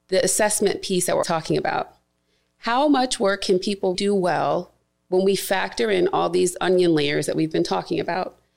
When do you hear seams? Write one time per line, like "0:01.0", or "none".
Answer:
0:01.2
0:03.9